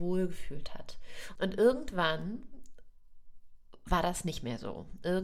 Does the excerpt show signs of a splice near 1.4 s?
yes; 1 cut; at 1.4 s

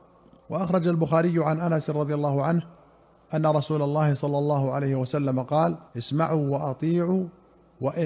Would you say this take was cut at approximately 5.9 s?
yes; 1 cut; at 5.9 s

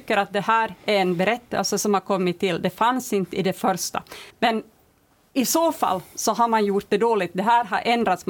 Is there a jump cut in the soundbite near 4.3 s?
yes; 1 cut; at 4.3 s

